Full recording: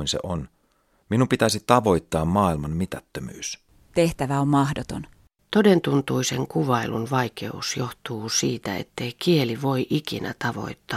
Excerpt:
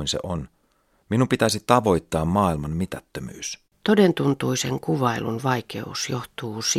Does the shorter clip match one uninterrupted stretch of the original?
no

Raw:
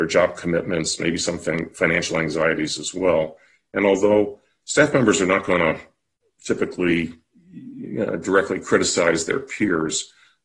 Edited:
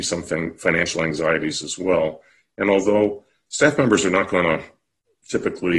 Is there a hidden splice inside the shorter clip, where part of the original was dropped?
no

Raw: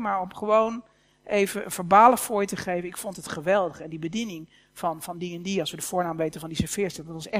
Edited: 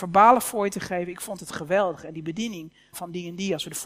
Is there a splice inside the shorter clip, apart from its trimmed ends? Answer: yes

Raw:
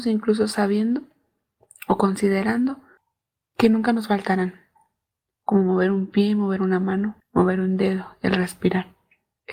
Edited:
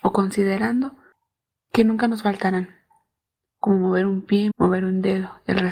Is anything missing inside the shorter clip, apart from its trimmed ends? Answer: yes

